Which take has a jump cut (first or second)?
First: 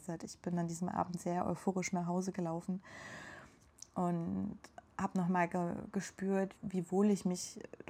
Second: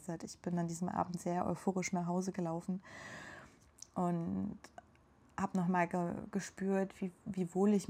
first